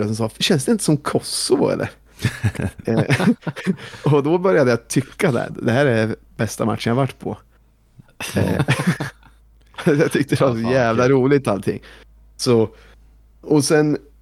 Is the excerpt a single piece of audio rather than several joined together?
no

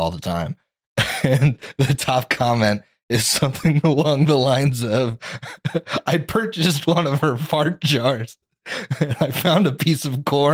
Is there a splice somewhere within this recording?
no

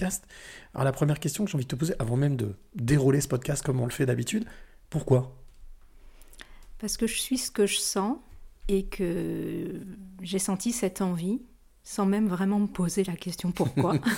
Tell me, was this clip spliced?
yes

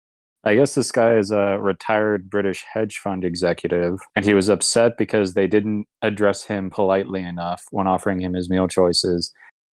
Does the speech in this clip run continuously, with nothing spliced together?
no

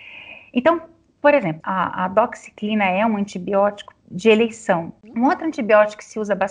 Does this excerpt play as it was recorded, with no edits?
no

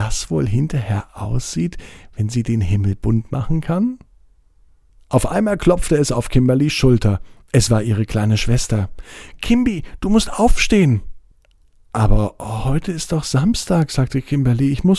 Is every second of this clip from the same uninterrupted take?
yes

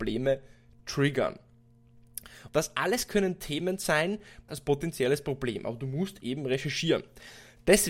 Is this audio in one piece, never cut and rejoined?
no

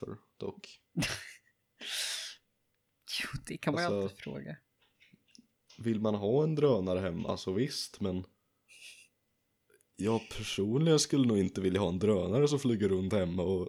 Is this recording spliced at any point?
no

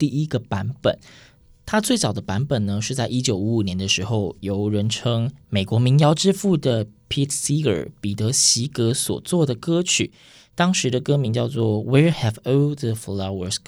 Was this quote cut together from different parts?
no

